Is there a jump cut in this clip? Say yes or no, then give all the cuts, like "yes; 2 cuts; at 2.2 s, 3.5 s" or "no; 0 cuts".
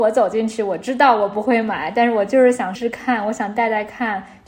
yes; 1 cut; at 2.8 s